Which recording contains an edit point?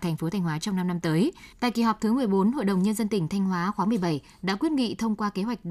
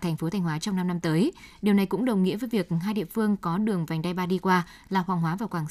first; 1 cut; at 1.5 s

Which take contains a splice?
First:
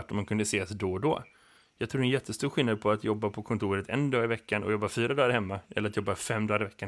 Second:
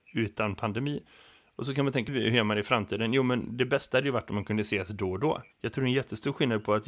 second; 2 cuts; at 2.1 s, 5.5 s

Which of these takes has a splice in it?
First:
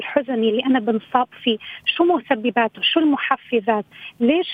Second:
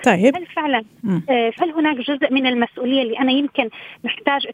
second; 1 cut; at 1.6 s

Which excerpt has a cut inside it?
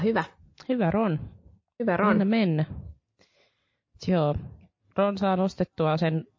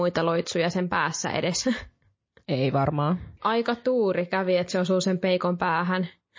second; 1 cut; at 3.4 s

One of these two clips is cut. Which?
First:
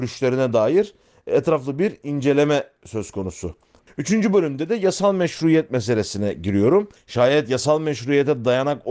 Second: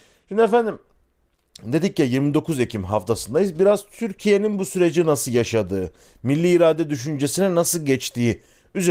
first; 2 cuts; at 3.9 s, 7.0 s

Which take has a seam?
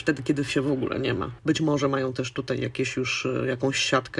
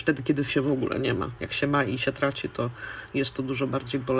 first; 1 cut; at 1.4 s

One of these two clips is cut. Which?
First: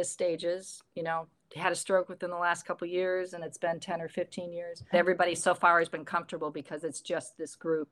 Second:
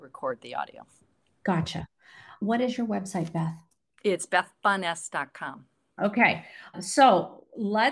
first; 1 cut; at 4.9 s

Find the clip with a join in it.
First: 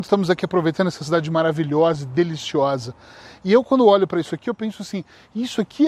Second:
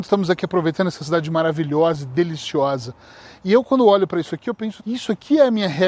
second; 1 cut; at 4.8 s

